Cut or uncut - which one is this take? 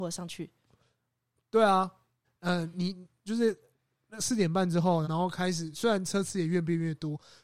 cut